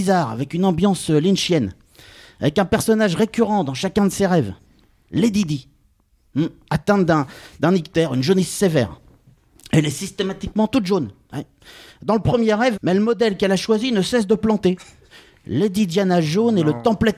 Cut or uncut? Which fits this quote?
cut